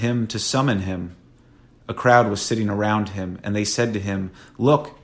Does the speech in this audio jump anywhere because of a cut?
no; 0 cuts

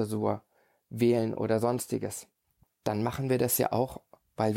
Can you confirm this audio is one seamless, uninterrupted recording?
no; 1 cut; at 2.6 s

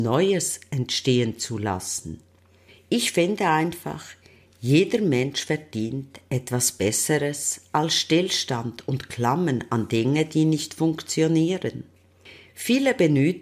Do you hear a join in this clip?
no; 0 cuts

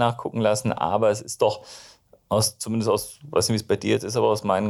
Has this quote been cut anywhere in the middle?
no; 0 cuts

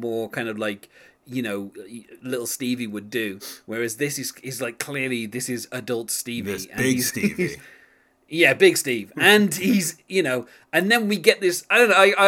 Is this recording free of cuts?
yes; 0 cuts

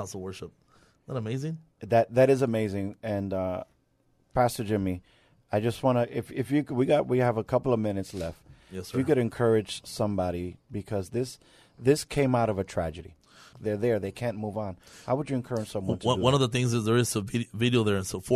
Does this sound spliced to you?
yes; 1 cut; at 13.5 s

